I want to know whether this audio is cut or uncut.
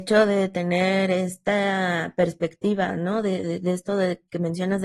uncut